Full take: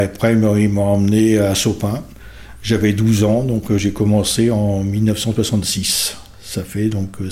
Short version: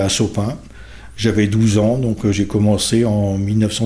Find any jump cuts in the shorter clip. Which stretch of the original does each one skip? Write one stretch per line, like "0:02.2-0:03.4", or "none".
none